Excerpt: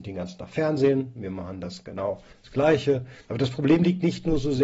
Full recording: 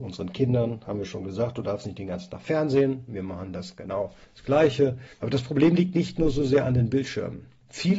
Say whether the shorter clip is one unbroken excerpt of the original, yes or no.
yes